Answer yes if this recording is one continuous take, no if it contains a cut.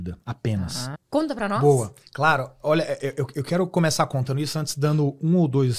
no